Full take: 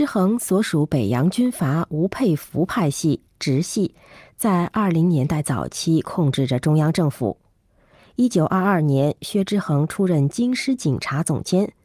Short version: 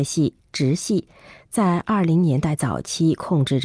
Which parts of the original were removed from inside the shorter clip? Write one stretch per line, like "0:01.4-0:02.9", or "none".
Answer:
none